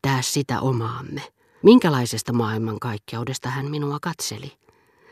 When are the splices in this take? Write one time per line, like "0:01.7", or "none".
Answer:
0:01.6